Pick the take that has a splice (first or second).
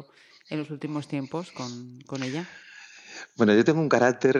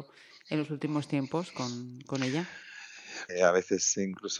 second